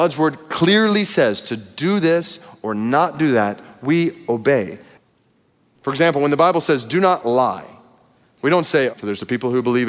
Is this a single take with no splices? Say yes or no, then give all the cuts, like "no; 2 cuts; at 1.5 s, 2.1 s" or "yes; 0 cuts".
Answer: no; 1 cut; at 8.9 s